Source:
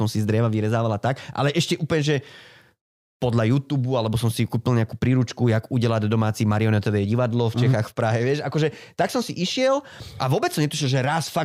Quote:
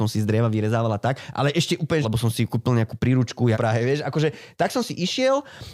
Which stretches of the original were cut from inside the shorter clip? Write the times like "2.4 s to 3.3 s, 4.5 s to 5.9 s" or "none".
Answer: 2.0 s to 4.0 s, 5.5 s to 7.9 s